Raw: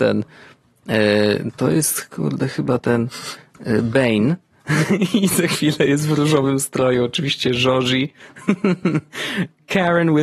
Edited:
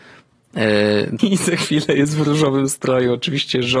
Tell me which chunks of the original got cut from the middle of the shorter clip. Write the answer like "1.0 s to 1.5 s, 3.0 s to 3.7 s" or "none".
1.5 s to 5.1 s